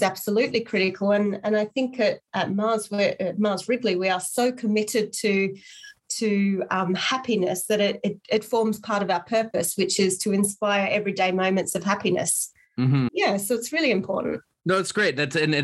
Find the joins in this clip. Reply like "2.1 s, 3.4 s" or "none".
13.1 s